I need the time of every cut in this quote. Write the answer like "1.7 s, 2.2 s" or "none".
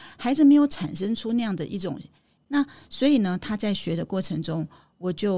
2.4 s